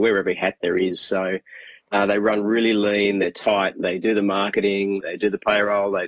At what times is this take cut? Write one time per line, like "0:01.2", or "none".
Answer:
0:05.0